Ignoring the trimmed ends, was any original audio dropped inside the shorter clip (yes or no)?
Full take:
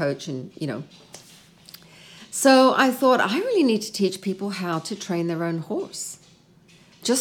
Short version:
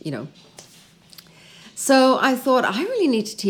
no